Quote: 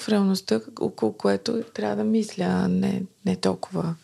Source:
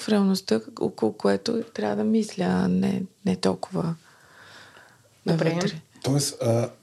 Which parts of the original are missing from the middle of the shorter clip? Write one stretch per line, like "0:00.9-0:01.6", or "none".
none